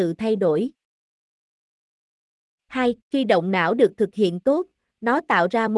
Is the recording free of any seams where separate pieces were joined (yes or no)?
no